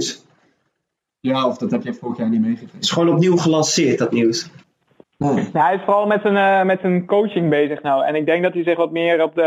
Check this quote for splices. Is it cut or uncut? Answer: uncut